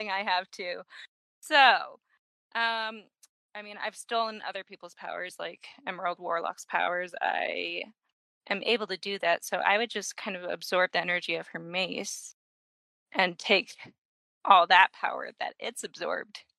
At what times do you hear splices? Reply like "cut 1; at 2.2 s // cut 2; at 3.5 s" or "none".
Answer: none

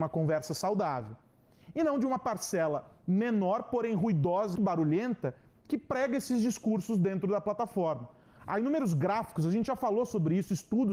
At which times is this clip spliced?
cut 1; at 4.6 s

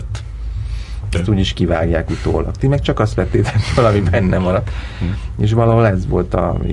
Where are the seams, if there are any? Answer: cut 1; at 1.1 s

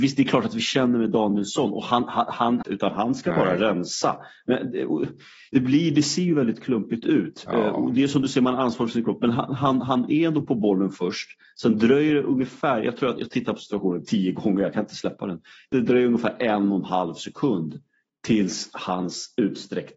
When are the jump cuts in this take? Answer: cut 1; at 2.6 s

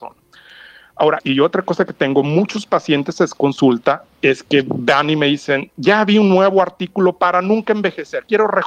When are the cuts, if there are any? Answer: cut 1; at 1.2 s

